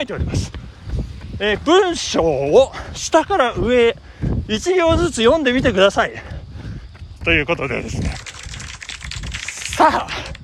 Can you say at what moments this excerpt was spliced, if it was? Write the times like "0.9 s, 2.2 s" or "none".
1.6 s, 7.2 s